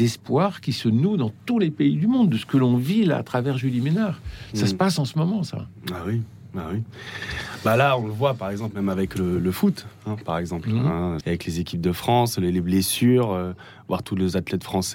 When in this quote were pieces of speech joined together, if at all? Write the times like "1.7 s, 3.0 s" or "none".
11.2 s